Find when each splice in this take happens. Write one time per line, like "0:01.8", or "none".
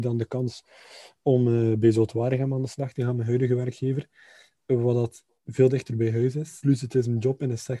none